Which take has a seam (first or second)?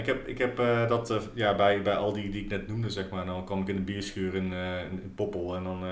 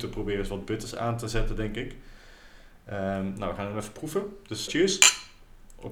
second